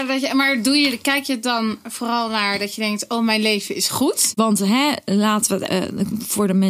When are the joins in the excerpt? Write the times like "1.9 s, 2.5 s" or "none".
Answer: 4.3 s, 5.7 s

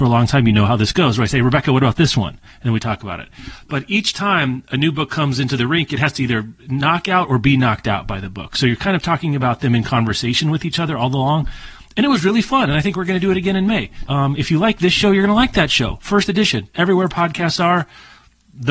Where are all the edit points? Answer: 14.1 s

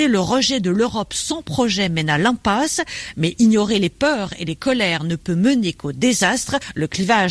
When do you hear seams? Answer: none

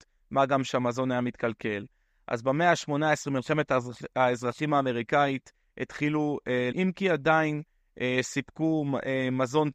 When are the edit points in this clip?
6.7 s

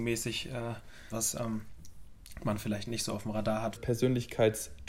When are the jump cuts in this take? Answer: 1.1 s, 3.8 s

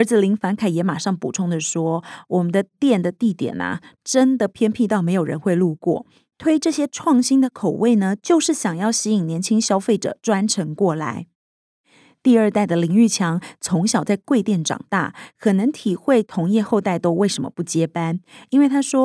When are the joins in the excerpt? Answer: none

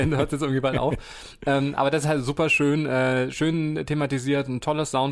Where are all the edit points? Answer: none

